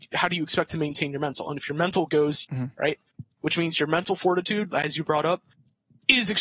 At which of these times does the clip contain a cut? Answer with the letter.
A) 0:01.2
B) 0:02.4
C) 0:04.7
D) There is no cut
B